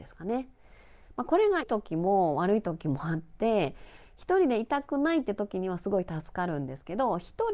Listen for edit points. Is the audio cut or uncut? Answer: cut